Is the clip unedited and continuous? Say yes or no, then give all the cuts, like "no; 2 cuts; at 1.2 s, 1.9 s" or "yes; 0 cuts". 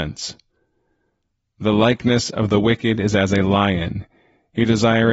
yes; 0 cuts